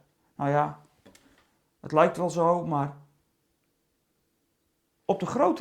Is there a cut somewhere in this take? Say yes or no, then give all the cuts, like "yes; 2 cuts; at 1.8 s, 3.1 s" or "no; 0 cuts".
no; 0 cuts